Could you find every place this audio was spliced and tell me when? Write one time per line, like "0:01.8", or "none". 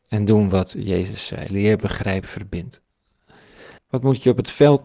0:01.5
0:03.8